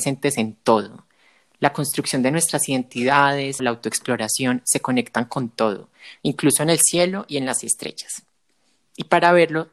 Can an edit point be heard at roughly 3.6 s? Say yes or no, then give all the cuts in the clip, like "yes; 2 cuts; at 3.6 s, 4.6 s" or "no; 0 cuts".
yes; 2 cuts; at 3.6 s, 6.2 s